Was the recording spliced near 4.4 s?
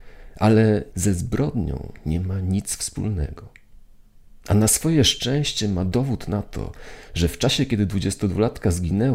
no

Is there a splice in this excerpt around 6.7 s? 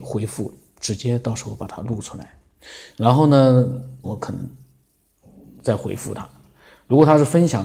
no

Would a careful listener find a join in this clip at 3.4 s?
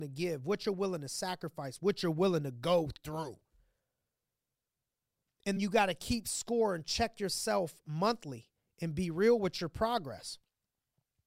no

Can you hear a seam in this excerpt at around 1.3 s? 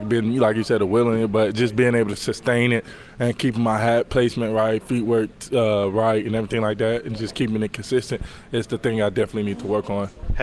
no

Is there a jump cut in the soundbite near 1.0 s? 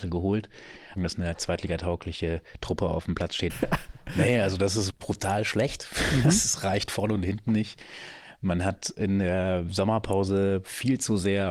yes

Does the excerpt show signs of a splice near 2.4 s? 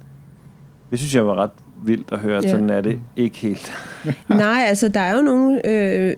no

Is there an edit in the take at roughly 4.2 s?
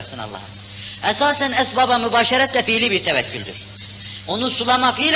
yes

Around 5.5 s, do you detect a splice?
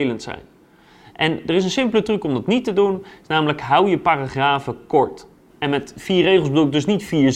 yes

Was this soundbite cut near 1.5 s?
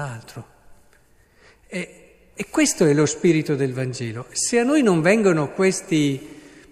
no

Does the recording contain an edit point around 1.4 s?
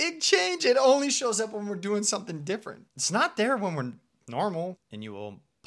no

